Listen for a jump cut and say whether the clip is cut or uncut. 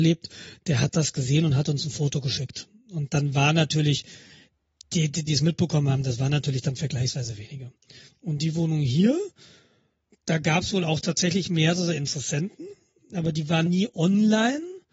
cut